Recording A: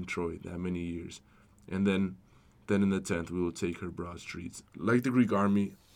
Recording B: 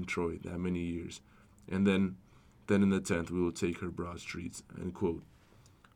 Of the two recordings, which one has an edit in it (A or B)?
A